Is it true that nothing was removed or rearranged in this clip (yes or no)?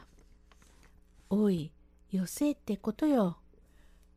yes